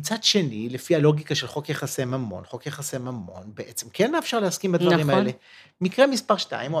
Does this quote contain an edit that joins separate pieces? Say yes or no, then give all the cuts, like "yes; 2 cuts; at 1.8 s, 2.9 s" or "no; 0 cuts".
no; 0 cuts